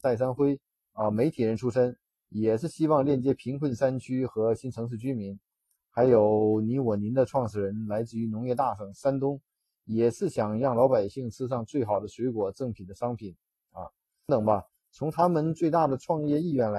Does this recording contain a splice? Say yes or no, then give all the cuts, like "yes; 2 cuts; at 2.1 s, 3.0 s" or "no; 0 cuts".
yes; 1 cut; at 14.3 s